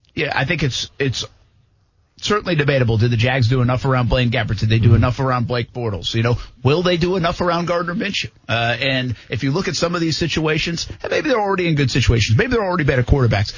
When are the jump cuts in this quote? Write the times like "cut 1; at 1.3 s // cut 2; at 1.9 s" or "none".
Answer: none